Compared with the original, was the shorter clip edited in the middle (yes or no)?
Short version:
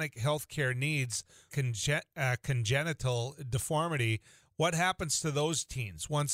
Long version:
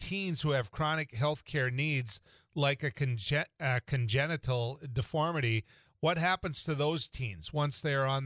yes